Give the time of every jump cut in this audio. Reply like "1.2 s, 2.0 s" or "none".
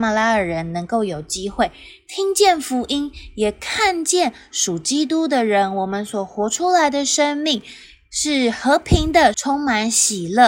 9.3 s